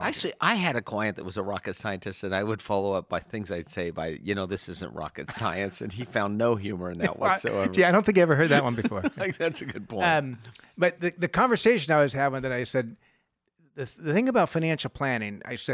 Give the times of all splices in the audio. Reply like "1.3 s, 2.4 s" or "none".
none